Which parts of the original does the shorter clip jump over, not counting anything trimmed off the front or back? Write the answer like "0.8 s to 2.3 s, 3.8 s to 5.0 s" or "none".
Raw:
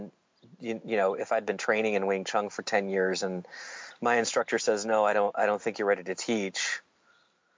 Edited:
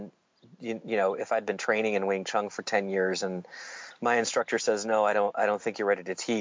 none